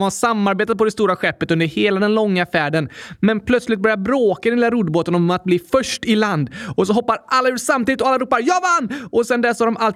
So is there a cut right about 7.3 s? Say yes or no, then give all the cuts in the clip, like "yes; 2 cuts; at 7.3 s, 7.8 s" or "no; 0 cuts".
no; 0 cuts